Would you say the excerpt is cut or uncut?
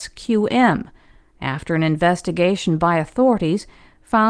uncut